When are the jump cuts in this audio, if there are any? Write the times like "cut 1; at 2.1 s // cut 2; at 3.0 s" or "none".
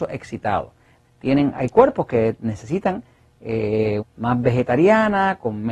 cut 1; at 1.0 s // cut 2; at 4.0 s